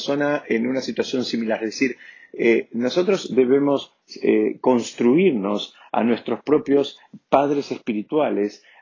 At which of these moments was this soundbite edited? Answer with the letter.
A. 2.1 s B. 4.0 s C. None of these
C